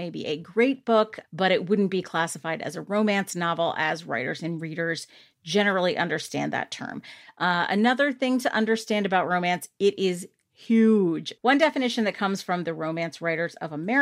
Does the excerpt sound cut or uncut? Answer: cut